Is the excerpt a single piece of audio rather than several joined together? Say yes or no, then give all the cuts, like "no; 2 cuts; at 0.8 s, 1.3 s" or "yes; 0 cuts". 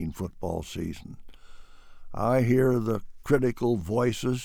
yes; 0 cuts